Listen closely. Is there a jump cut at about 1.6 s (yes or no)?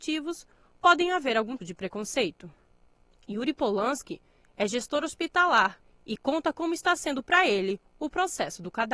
yes